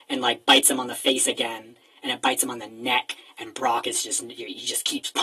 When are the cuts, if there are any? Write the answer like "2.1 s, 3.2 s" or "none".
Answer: none